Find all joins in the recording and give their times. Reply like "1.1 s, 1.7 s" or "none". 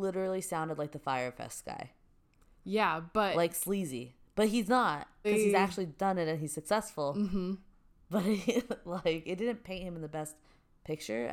5.2 s